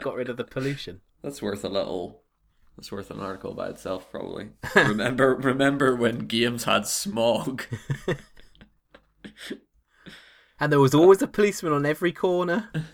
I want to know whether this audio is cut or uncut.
cut